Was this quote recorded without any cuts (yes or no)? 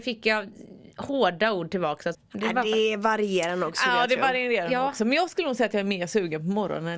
no